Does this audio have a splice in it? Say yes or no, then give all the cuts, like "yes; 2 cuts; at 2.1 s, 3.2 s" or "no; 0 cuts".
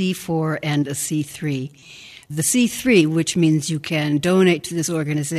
no; 0 cuts